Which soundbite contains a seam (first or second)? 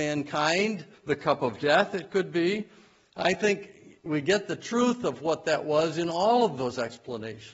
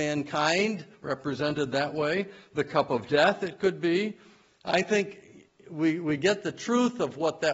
first